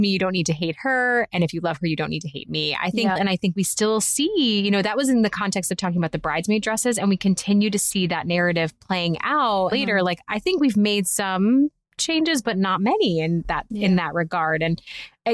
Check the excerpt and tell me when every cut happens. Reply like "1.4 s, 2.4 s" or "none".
3.2 s, 9.7 s